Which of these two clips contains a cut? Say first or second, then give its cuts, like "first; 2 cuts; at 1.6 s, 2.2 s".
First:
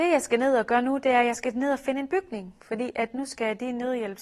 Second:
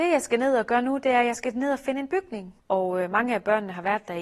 second; 1 cut; at 2.6 s